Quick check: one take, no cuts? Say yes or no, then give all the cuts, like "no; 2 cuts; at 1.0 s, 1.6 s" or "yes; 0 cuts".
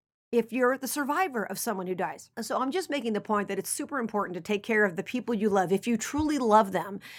no; 1 cut; at 2.3 s